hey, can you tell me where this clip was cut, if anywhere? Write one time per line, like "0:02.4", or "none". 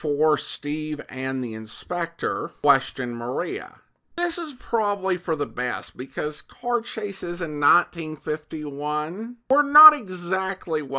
none